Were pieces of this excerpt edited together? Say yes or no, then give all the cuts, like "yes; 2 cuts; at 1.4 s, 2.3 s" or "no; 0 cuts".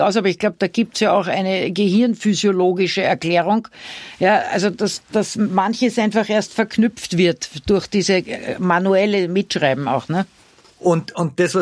no; 0 cuts